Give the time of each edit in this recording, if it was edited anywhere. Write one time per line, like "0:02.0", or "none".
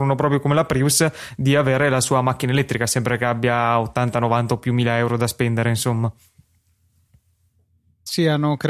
none